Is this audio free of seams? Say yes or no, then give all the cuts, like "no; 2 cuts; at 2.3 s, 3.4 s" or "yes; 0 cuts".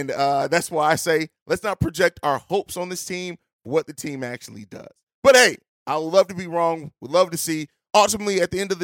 yes; 0 cuts